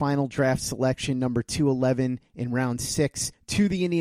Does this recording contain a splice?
no; 0 cuts

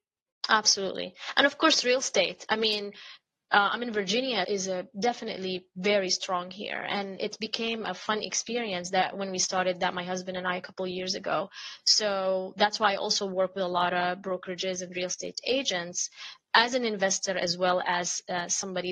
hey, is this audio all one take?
no; 2 cuts; at 4.4 s, 7.2 s

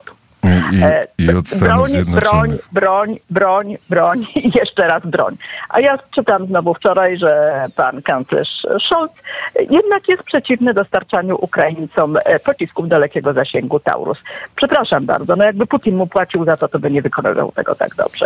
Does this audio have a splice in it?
yes; 1 cut; at 3.8 s

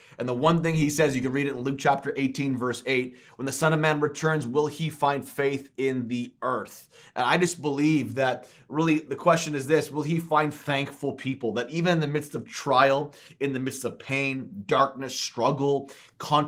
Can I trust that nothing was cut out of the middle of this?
yes; 0 cuts

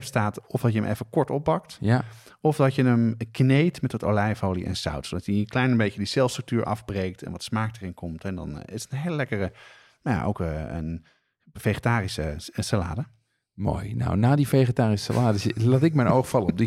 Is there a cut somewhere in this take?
no; 0 cuts

